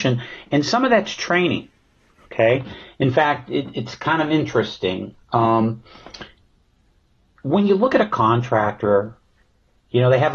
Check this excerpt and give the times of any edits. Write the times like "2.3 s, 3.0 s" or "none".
none

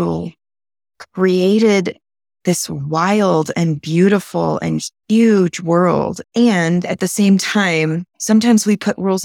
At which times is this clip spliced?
6.2 s

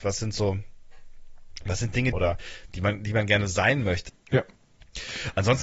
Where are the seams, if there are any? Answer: 2.1 s, 4.1 s

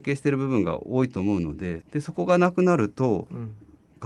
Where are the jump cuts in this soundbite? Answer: 1.8 s

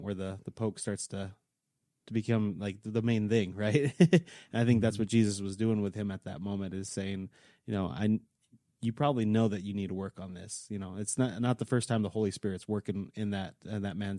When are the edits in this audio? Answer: none

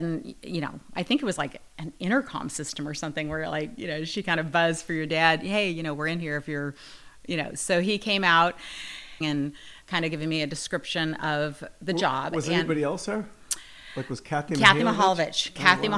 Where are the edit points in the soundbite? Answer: 9.2 s

